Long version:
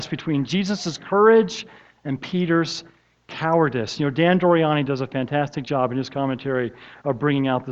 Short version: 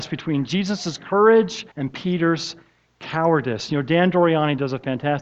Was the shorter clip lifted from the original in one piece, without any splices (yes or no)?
no